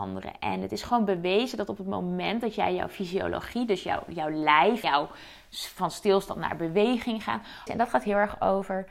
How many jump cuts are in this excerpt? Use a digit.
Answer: 2